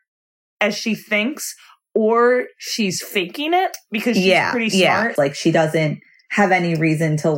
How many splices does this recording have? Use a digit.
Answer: 1